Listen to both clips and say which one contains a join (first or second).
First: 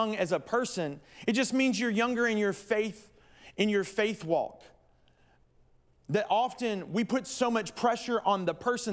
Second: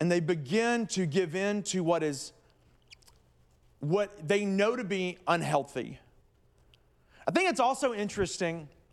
second